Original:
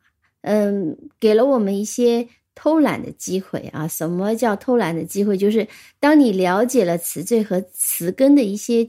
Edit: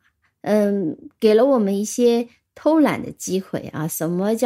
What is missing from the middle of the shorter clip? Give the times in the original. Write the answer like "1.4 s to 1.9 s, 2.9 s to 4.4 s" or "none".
none